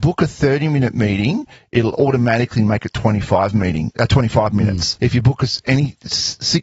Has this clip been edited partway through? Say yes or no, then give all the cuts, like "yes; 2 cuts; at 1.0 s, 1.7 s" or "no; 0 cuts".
yes; 1 cut; at 5.0 s